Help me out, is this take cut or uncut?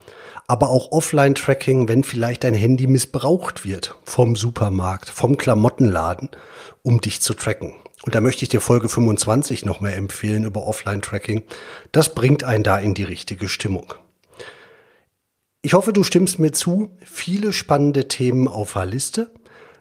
uncut